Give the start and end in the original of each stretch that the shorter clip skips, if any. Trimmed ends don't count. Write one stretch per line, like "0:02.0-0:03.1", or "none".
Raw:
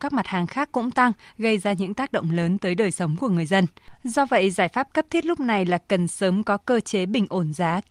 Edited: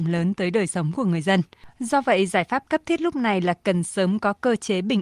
none